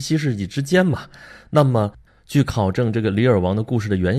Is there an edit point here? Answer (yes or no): no